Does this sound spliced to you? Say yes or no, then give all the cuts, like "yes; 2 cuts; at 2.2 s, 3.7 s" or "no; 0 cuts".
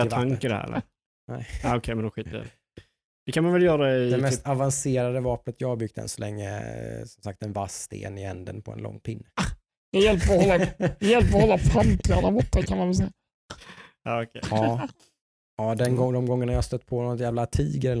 no; 0 cuts